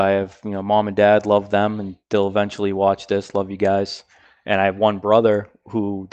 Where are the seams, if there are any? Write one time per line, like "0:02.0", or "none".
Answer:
none